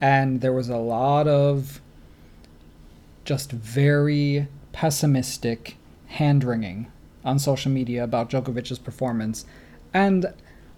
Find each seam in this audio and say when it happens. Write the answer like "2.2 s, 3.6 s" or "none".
none